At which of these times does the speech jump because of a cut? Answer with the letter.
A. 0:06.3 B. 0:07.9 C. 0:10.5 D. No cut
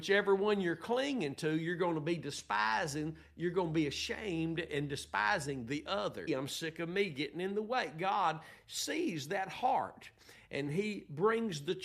A